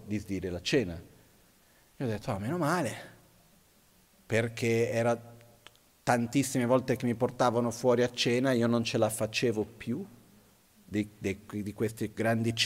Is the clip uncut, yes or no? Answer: yes